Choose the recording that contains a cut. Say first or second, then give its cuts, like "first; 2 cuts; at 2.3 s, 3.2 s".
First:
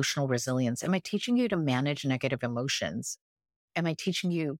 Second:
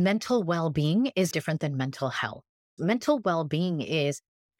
second; 2 cuts; at 1.3 s, 2.8 s